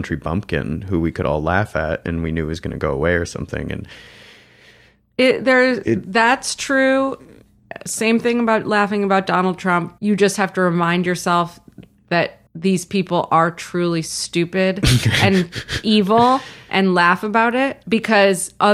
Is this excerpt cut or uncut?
cut